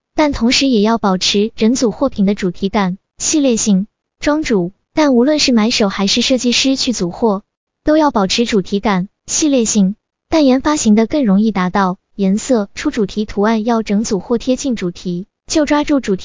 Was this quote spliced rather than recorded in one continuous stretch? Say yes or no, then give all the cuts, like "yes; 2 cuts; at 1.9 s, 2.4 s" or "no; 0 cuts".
yes; 2 cuts; at 4.1 s, 12.1 s